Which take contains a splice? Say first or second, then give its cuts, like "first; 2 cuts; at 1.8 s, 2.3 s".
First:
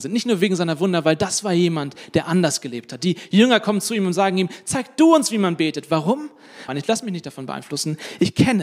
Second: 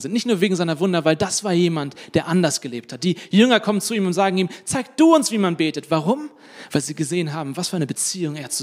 first; 1 cut; at 6.7 s